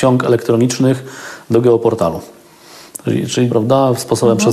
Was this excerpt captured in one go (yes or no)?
no